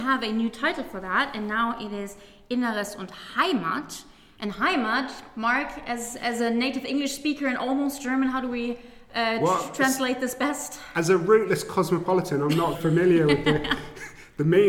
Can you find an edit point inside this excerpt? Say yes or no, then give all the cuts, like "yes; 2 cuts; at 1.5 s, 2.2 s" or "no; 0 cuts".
yes; 1 cut; at 12.7 s